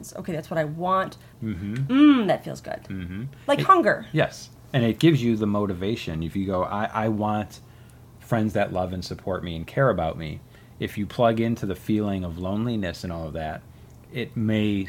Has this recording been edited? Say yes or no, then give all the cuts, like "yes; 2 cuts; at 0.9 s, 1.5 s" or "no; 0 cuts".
yes; 1 cut; at 1.3 s